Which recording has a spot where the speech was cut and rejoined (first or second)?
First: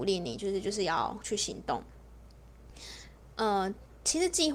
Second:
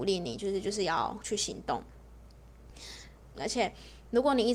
second